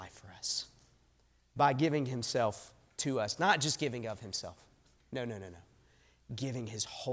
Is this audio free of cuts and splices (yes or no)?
yes